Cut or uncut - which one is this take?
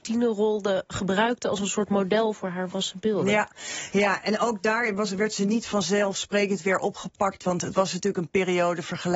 uncut